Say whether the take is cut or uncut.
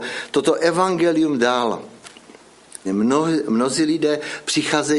cut